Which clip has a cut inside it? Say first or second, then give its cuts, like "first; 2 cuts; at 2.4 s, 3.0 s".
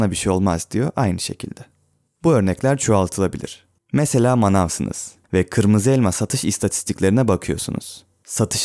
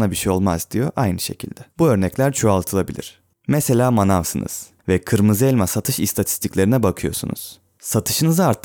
second; 1 cut; at 1.7 s